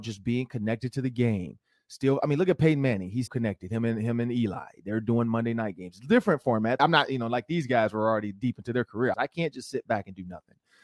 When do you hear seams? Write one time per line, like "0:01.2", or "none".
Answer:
0:03.3
0:06.8
0:09.1